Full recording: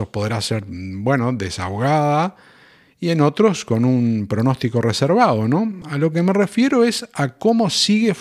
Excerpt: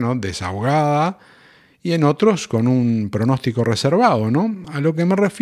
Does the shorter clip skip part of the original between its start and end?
no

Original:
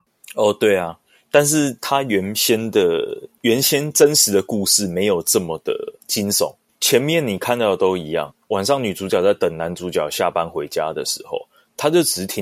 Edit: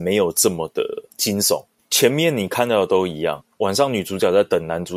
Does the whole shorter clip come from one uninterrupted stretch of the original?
yes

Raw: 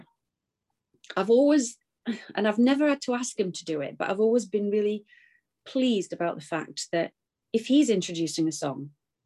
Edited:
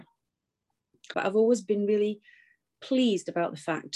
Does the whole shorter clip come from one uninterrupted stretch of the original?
no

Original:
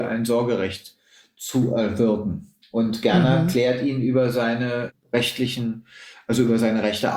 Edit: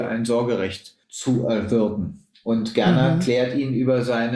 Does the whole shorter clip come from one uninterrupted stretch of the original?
no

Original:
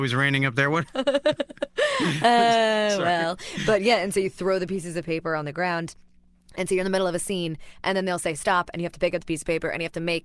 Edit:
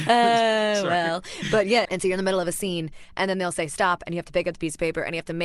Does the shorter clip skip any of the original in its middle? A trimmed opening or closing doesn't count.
yes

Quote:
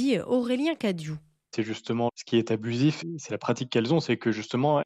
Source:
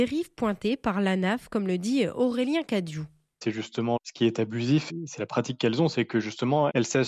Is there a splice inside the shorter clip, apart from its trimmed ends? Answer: no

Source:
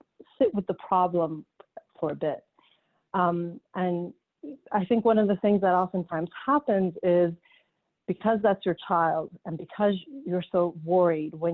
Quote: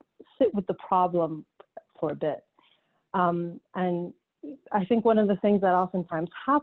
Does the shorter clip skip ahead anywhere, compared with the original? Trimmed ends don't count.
no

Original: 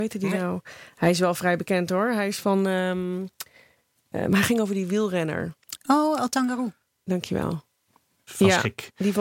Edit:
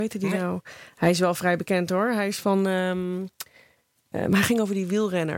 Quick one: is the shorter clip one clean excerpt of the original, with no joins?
yes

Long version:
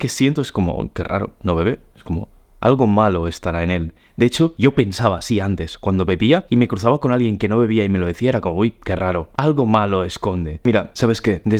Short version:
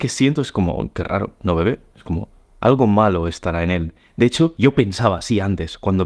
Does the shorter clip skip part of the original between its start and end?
no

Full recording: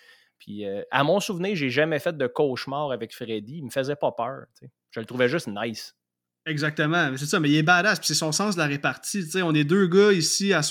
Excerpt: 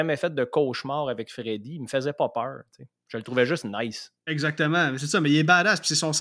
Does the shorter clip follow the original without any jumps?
no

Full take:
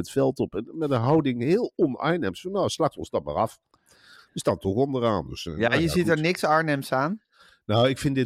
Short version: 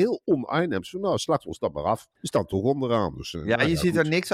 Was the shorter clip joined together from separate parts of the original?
yes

